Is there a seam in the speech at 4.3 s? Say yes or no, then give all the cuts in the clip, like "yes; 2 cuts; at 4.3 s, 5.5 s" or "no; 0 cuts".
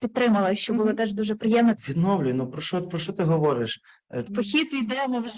yes; 2 cuts; at 1.8 s, 4.3 s